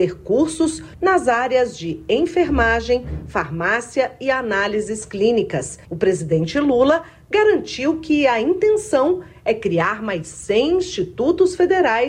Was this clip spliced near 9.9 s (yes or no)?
no